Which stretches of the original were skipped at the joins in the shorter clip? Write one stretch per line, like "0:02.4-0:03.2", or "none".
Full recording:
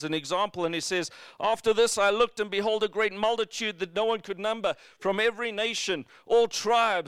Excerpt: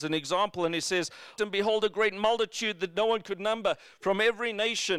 0:01.4-0:02.4

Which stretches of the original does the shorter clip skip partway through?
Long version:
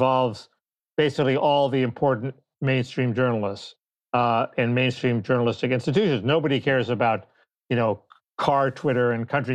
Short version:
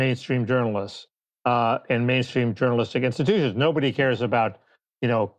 none

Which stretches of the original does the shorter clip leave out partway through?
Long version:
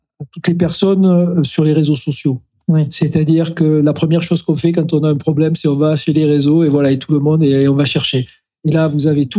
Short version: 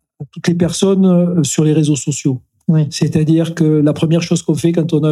none

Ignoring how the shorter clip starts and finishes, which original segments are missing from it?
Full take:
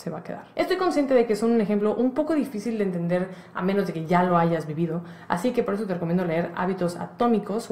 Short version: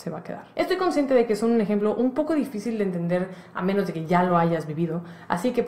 none

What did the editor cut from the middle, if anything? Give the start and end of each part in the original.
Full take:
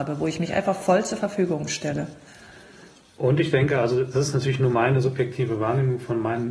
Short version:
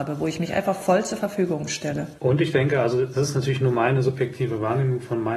0:02.2-0:03.2

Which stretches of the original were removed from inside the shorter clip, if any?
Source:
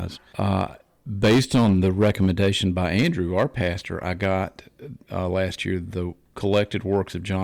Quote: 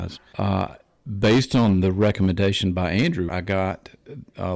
0:03.3-0:04.0

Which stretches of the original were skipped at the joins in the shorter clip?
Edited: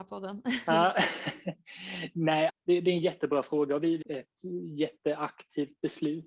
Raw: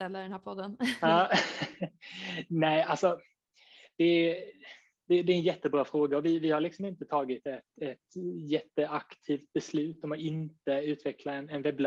0:02.8-0:04.9
0:06.4-0:07.7

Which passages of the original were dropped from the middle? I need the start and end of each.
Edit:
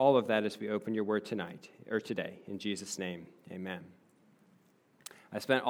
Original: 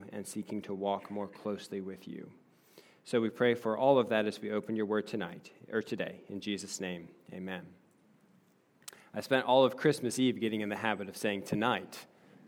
none

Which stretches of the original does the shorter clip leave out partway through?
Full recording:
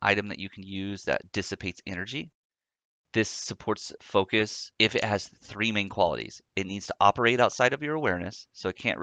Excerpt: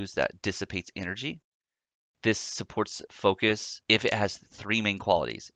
none

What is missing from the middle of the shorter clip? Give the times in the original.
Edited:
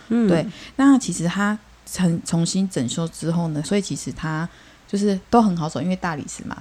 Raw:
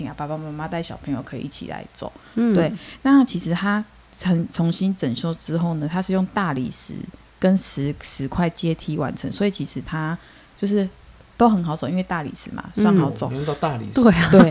0:05.9-0:09.3
0:10.9-0:11.3

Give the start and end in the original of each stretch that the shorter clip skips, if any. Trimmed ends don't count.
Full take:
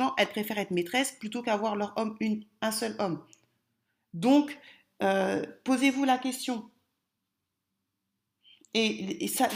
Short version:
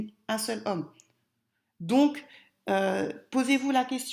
none

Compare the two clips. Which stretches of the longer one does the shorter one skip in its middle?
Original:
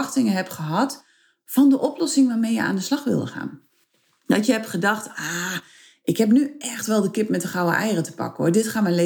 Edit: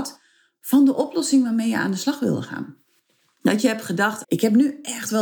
0:05.1-0:06.0

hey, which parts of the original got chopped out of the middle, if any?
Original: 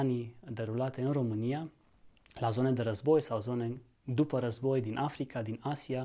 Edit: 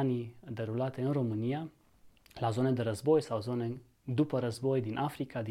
none

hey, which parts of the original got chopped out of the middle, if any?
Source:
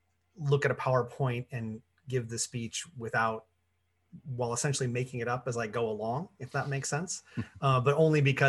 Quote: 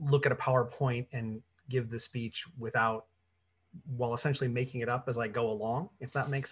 none

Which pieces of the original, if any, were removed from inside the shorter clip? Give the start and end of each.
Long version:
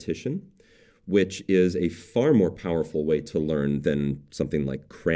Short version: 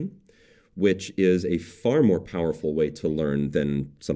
none

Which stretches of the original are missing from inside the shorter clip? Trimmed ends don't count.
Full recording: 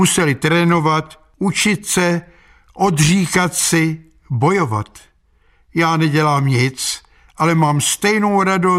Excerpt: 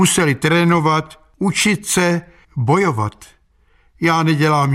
0:02.4-0:04.2

